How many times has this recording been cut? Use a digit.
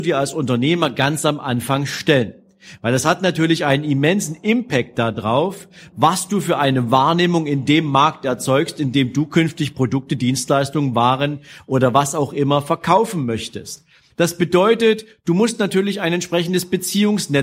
1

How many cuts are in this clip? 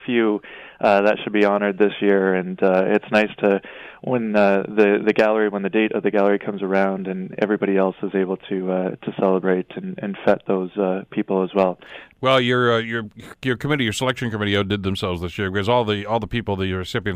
1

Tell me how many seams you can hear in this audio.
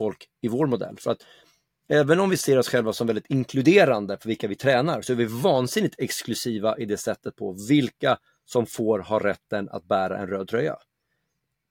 0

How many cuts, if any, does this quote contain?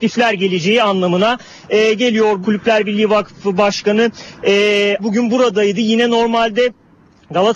2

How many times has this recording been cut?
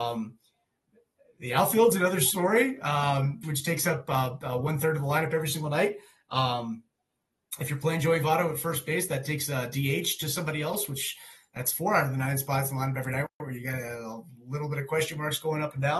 1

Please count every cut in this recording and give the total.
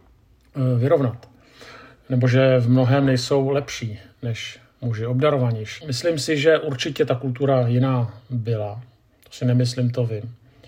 1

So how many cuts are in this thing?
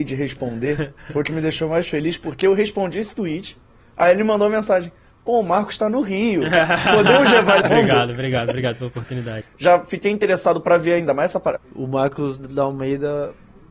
3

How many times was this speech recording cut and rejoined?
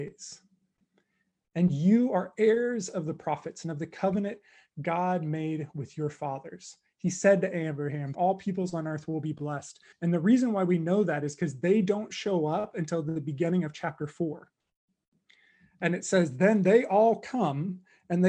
2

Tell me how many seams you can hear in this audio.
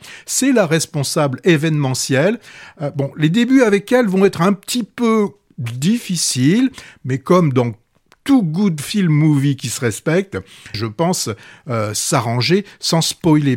1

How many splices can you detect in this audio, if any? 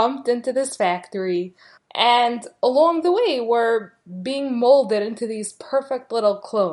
1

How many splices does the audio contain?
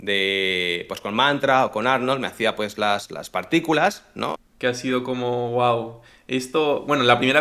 1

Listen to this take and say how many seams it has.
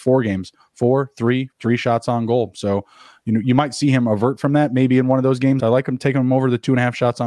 2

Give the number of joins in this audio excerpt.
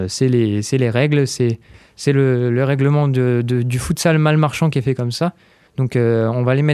1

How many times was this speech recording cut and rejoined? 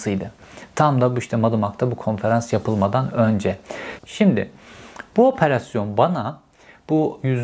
1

